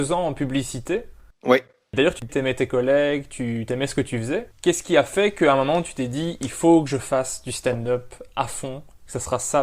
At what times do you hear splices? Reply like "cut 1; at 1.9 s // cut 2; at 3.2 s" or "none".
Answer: cut 1; at 2.3 s // cut 2; at 4.5 s

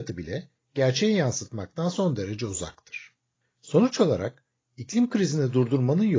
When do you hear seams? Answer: cut 1; at 3.4 s

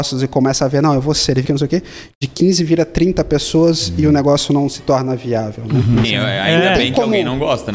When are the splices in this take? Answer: cut 1; at 1.4 s // cut 2; at 6.0 s

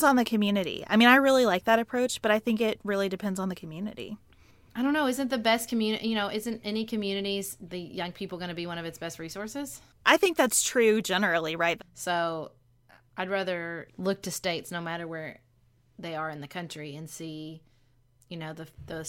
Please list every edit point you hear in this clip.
cut 1; at 11.8 s // cut 2; at 13.9 s

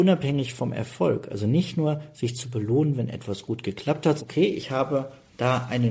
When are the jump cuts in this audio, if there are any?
cut 1; at 4.2 s

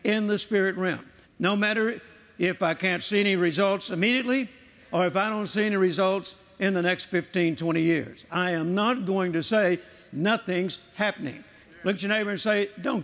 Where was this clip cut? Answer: cut 1; at 1.2 s // cut 2; at 11.6 s

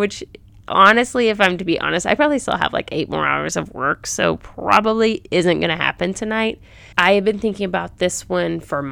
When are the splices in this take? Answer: cut 1; at 6.9 s

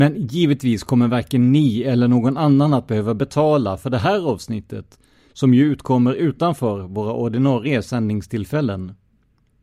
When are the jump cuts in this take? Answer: none

